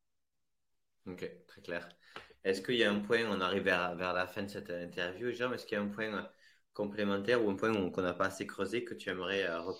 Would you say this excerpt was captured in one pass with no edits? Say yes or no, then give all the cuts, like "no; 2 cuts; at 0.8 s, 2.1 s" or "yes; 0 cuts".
yes; 0 cuts